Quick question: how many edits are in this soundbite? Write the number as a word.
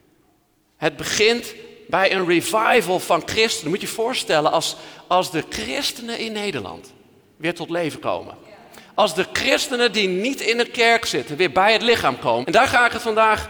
one